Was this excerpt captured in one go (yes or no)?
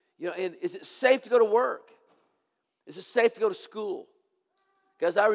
yes